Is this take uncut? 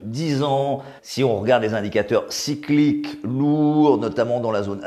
no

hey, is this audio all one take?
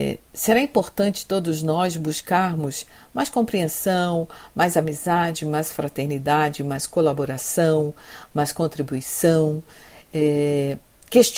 yes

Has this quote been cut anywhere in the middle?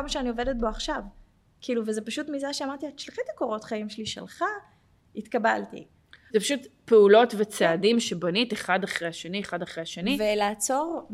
yes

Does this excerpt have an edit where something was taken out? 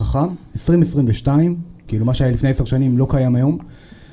yes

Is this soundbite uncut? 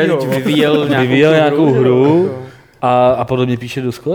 yes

